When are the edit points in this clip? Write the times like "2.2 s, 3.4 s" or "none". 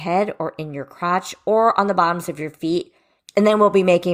3.2 s